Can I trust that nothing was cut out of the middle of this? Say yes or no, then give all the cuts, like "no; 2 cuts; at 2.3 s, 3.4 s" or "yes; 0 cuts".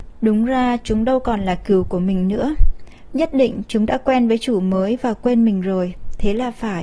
no; 1 cut; at 3.1 s